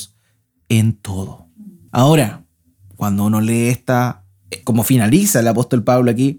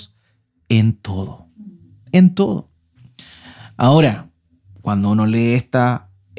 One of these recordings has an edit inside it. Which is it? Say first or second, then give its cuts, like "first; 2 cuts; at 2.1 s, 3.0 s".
first; 2 cuts; at 1.9 s, 4.6 s